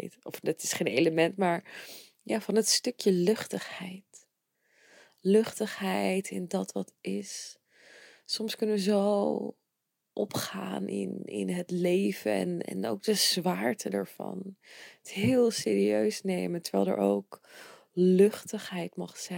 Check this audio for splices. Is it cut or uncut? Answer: uncut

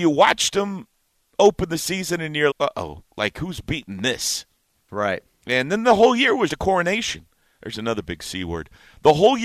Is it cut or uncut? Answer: cut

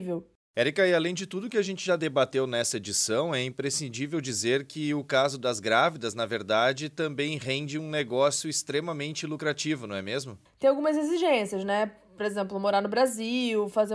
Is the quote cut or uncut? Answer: cut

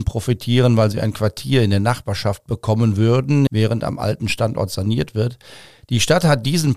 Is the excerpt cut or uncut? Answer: cut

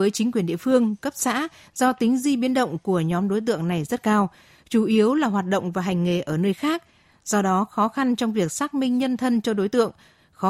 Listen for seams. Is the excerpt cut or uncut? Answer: uncut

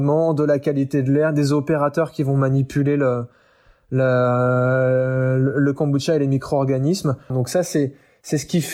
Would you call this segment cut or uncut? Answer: cut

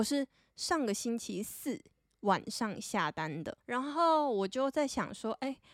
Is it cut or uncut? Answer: cut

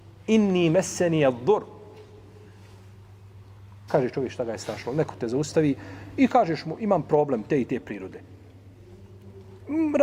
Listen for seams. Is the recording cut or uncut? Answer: cut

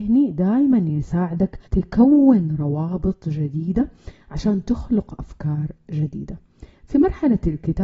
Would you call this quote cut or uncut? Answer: cut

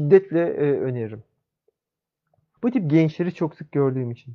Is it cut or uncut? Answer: cut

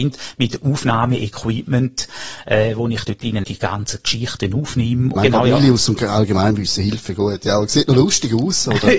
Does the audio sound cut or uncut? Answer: cut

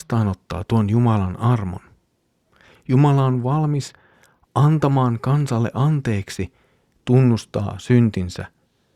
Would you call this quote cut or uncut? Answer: cut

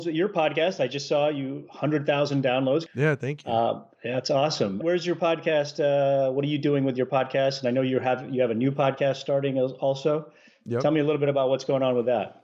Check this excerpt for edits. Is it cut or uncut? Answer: cut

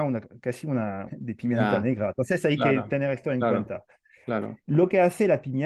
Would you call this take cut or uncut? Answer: cut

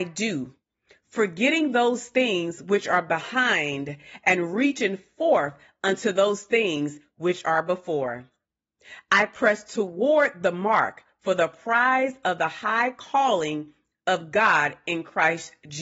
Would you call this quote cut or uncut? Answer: uncut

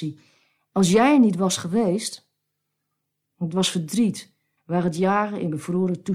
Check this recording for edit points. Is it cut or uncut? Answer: cut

